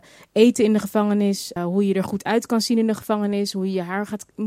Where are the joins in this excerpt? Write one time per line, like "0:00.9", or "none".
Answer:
0:01.6